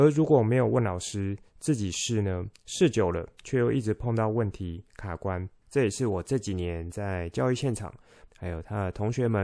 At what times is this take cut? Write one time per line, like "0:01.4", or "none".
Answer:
0:05.6
0:08.3